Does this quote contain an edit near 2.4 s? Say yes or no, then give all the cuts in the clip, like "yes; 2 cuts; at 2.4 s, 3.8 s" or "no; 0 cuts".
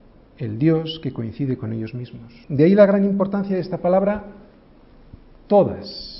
yes; 1 cut; at 2.4 s